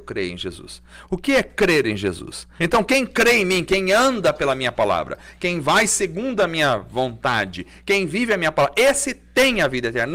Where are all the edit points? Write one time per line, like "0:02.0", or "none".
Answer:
0:02.6
0:03.7